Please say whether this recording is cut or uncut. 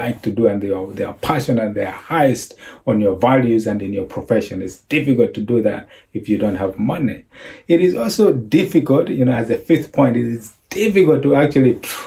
uncut